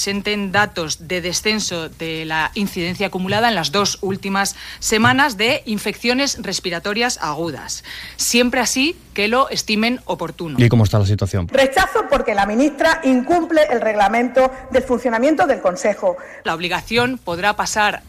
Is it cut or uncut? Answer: cut